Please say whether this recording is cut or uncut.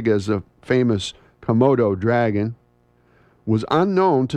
uncut